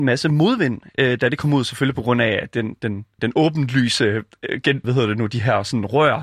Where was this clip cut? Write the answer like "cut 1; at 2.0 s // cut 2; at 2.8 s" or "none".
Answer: cut 1; at 3.2 s // cut 2; at 4.8 s